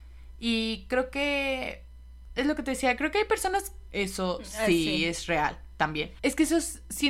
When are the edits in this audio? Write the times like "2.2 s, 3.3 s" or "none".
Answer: 3.9 s, 6.2 s